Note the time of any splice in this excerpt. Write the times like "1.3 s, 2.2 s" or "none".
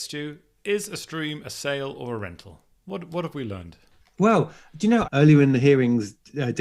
4.0 s, 5.0 s